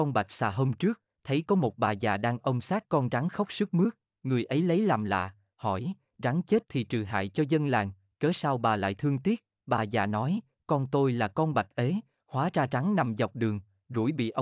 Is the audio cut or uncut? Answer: uncut